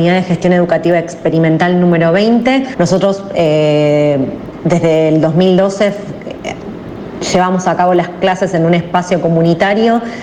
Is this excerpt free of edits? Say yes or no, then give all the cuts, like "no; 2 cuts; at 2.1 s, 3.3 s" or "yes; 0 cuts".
no; 1 cut; at 2.7 s